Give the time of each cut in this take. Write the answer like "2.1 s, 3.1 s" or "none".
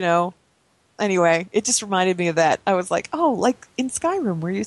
none